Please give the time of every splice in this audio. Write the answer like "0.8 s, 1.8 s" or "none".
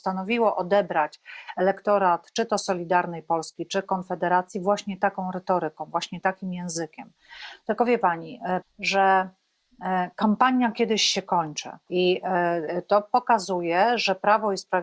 8.6 s, 11.9 s